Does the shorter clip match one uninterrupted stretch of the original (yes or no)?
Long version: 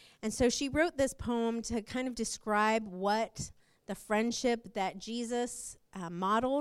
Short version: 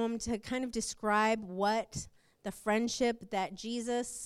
yes